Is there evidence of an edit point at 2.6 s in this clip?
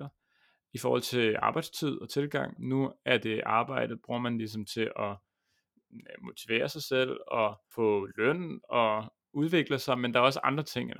yes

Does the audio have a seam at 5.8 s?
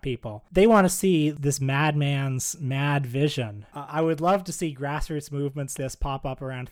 yes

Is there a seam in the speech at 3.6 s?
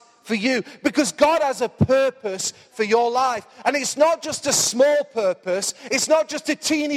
no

